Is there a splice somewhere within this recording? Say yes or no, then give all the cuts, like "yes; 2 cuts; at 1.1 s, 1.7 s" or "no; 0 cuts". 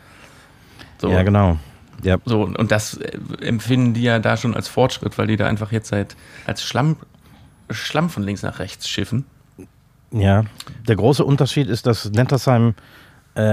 yes; 1 cut; at 6.5 s